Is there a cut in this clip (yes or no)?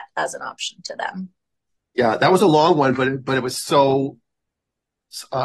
no